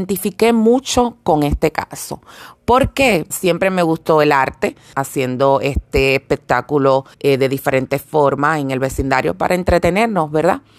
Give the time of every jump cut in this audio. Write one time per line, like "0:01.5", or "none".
0:03.3
0:04.9
0:07.1